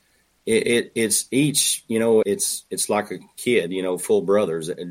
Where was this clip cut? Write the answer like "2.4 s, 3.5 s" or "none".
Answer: 2.2 s